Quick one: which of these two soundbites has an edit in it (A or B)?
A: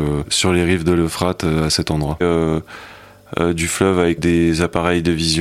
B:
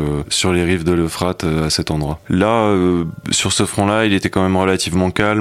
A